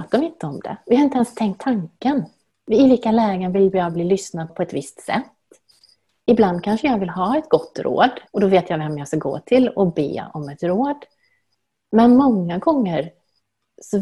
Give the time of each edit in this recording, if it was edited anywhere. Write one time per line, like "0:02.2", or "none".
0:04.5
0:08.3